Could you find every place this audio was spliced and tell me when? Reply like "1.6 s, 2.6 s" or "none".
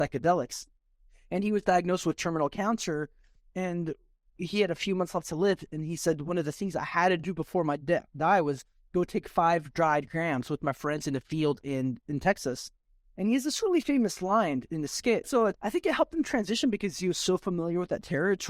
15.2 s